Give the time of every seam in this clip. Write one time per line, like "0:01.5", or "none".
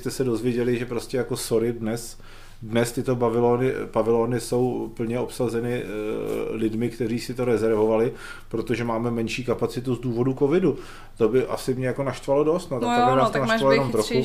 none